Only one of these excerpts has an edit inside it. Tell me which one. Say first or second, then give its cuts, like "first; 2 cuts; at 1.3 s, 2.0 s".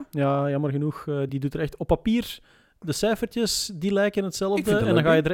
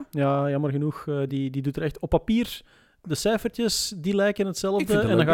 first; 1 cut; at 1.3 s